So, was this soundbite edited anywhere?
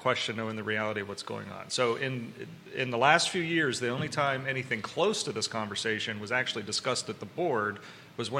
no; 0 cuts

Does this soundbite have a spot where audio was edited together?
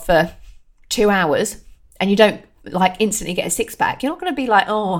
no; 0 cuts

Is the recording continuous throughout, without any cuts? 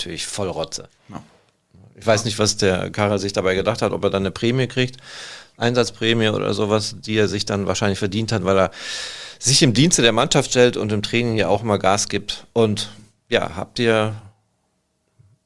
no; 1 cut; at 0.9 s

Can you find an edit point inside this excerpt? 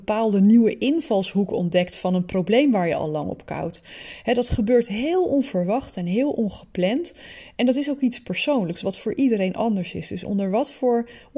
no; 0 cuts

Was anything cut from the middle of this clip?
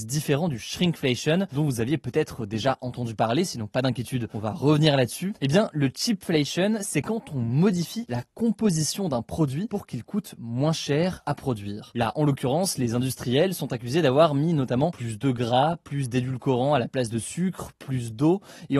no; 0 cuts

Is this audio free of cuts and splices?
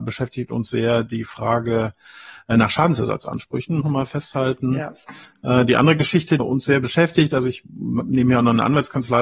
no; 2 cuts; at 3.8 s, 6.4 s

